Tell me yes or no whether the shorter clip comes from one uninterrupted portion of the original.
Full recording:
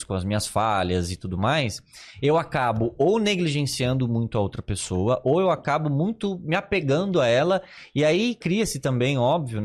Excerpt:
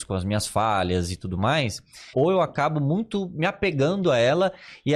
no